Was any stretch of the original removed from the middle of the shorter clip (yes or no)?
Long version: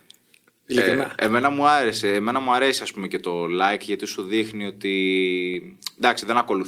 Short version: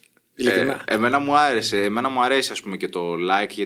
no